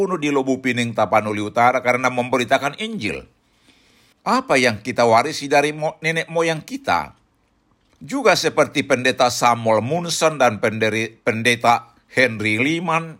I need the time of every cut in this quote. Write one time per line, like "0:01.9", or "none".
0:04.1
0:07.9

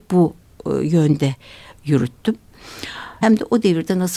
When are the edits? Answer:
0:03.2

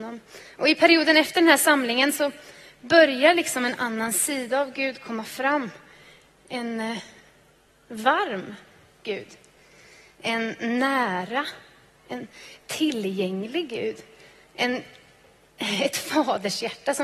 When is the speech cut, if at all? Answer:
none

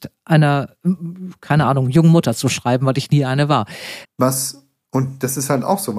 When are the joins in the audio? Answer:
0:04.0

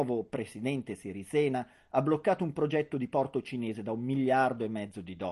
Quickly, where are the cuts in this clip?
none

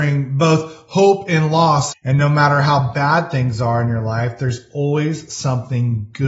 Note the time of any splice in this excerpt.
0:01.9

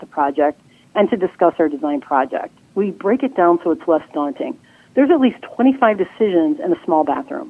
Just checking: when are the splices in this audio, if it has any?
0:02.7

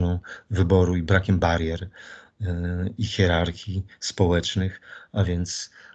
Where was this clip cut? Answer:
none

